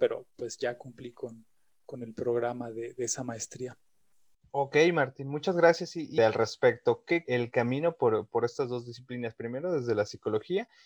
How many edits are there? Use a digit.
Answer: 2